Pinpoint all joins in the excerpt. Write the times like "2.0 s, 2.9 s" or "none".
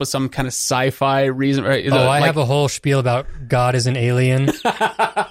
none

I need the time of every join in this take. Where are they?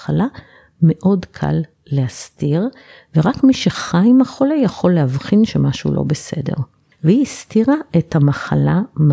none

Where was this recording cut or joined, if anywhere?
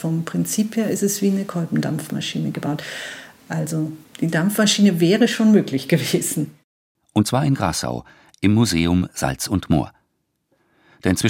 7.0 s

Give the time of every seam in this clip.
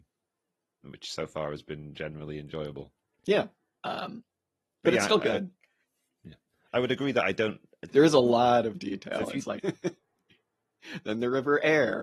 3.8 s, 7.9 s, 9.6 s

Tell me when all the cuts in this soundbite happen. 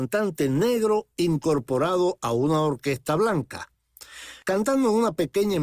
4.4 s

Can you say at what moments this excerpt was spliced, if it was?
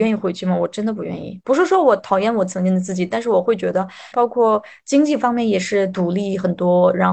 2.0 s, 4.1 s

